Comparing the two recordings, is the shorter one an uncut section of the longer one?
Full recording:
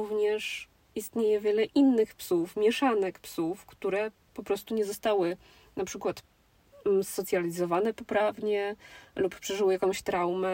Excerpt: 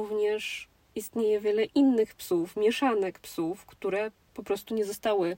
yes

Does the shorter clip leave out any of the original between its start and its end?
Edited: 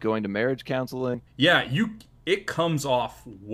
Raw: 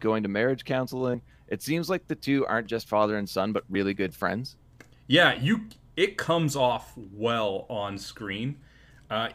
yes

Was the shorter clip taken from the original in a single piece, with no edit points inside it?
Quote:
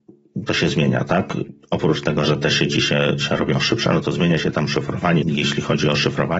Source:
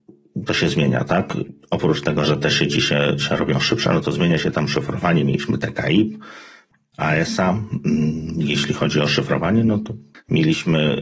no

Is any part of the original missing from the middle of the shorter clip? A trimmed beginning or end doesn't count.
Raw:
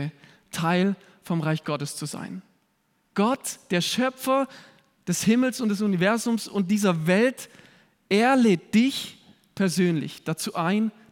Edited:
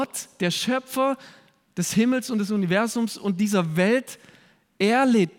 no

